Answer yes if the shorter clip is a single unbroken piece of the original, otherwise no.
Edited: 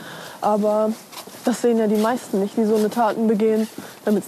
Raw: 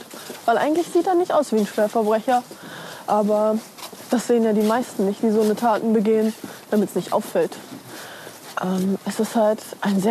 yes